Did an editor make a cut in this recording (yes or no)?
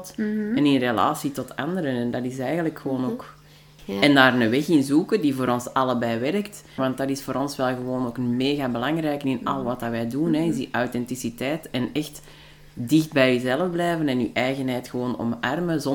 yes